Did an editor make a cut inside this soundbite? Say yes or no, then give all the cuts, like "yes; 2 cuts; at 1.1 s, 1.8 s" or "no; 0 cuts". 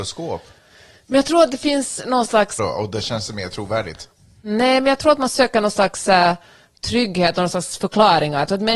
yes; 1 cut; at 2.6 s